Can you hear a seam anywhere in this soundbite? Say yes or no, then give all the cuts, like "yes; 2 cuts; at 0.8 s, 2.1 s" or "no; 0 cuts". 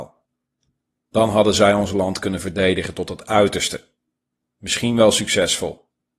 no; 0 cuts